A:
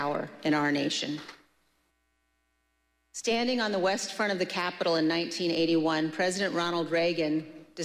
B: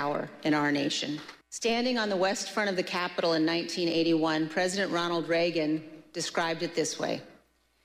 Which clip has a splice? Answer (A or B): B